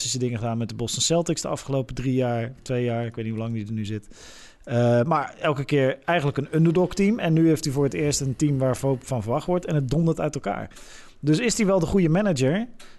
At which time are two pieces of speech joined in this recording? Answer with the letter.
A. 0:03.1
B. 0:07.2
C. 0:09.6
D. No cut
D